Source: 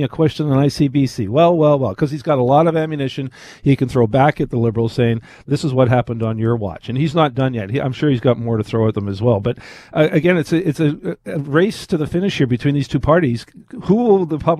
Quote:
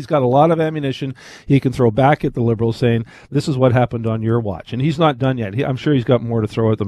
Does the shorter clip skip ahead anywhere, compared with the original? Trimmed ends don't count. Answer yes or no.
no